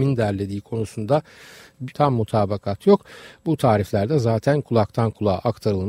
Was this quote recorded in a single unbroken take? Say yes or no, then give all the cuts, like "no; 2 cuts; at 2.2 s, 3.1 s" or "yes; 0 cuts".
yes; 0 cuts